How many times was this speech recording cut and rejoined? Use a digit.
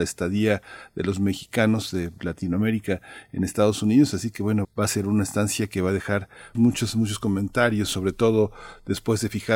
2